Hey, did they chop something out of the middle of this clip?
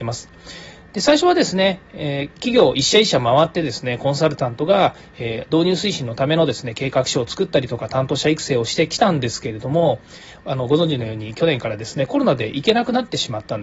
no; 0 cuts

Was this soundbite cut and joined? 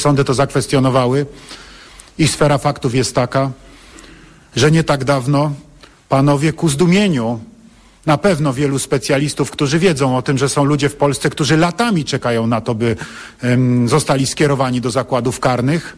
no; 0 cuts

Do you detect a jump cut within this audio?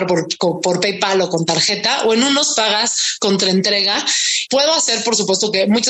yes; 1 cut; at 4.5 s

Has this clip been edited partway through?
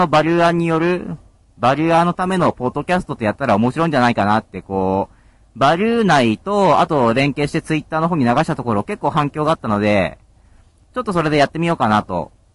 no; 0 cuts

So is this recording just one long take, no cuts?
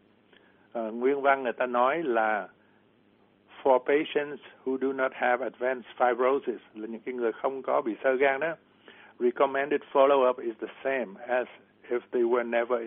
yes; 0 cuts

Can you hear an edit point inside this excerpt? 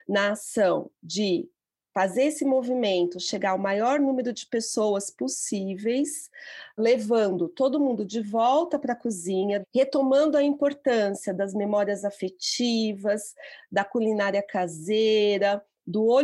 yes; 2 cuts; at 6.8 s, 9.6 s

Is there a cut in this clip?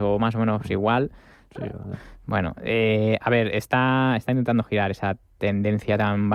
yes; 1 cut; at 1.9 s

